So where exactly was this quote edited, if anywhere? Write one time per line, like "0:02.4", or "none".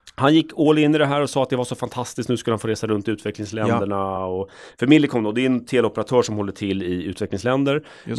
none

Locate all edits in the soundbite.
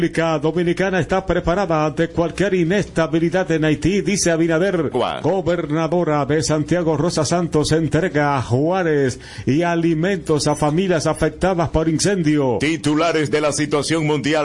0:04.9

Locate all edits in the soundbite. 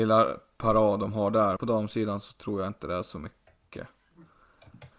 0:01.6

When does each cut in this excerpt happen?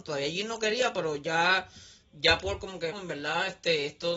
0:02.9

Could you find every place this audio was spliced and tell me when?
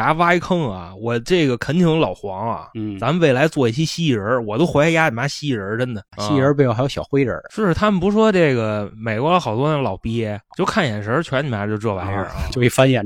0:06.1

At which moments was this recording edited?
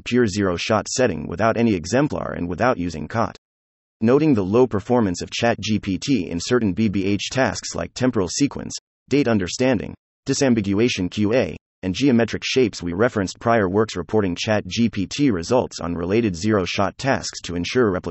none

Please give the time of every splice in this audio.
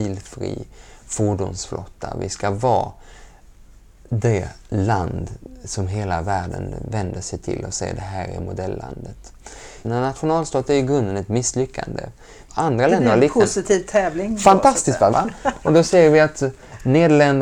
0:09.8
0:12.5
0:15.1

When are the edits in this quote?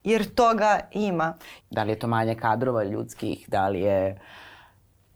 0:01.6

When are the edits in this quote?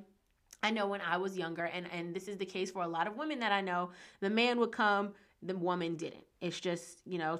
none

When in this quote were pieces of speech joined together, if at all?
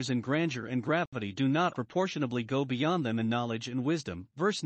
0:01.7

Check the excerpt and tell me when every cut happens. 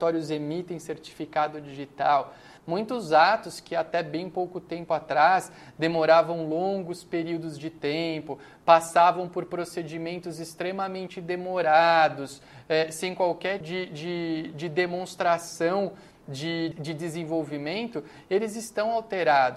0:02.6
0:13.6
0:16.7

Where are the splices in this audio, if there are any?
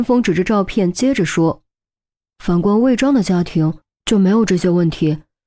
none

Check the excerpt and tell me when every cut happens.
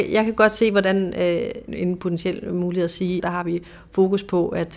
0:01.7
0:03.2

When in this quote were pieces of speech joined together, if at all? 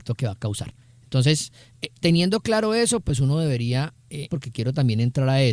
0:04.3

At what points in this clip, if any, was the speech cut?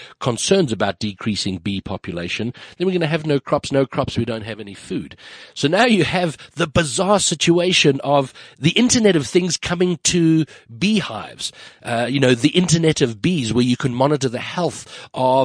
none

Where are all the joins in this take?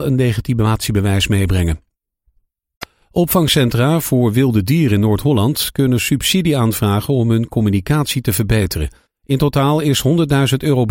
0:09.1

